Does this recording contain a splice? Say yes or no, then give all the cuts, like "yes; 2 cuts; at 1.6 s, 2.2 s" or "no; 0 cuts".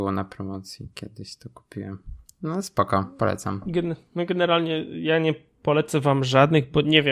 no; 0 cuts